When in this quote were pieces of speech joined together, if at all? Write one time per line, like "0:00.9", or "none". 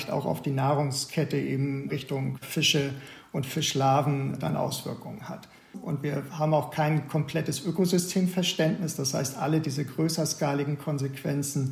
0:05.7